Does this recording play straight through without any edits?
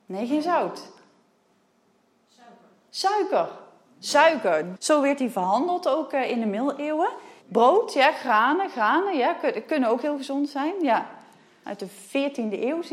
no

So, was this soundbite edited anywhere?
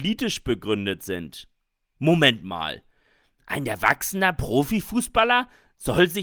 no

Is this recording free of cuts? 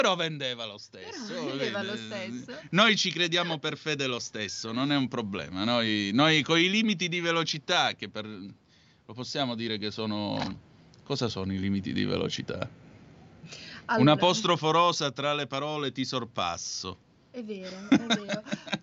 yes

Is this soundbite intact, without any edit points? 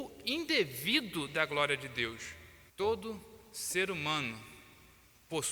no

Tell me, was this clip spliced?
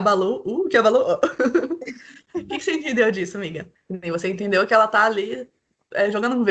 yes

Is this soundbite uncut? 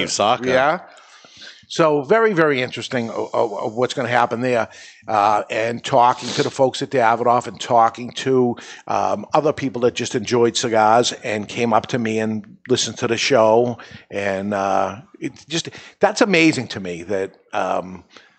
yes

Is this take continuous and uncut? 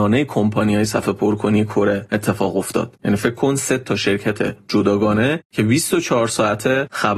no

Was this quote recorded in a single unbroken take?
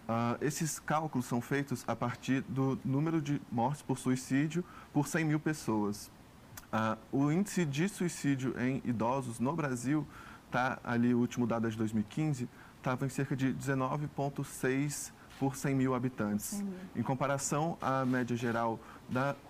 yes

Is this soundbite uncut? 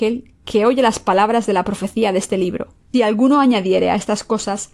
no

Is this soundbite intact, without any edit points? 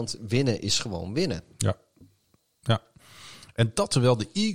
yes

